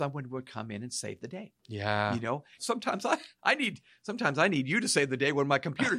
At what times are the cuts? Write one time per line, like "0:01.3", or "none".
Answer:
0:02.6